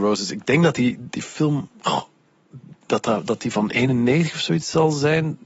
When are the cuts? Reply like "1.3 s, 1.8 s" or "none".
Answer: none